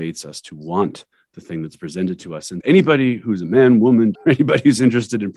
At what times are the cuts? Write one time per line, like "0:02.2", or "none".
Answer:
0:02.6
0:04.1

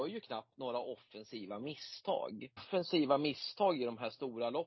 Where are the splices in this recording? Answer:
0:02.6

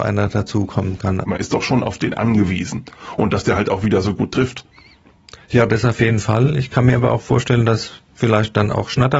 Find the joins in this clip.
0:01.2

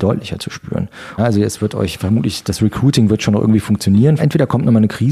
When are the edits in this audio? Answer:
0:01.2
0:04.2

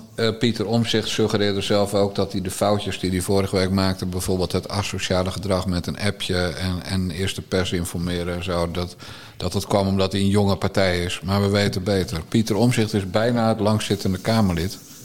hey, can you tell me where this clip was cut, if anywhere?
none

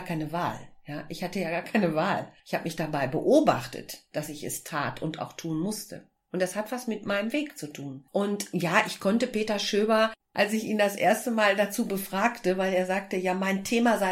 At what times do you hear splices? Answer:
none

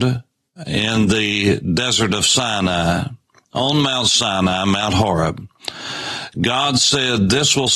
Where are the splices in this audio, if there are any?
none

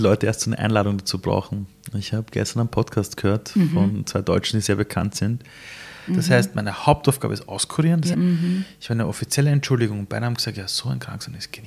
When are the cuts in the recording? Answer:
0:06.1
0:08.1

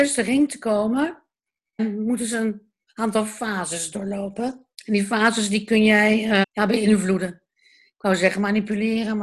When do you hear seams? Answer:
0:01.8
0:04.7
0:06.4

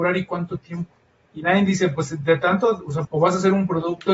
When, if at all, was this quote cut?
0:01.3
0:03.0

